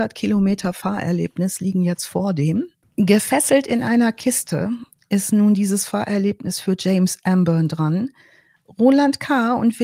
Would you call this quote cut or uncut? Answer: cut